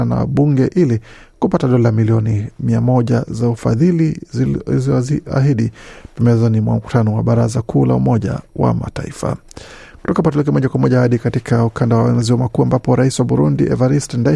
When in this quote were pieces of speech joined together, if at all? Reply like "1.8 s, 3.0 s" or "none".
none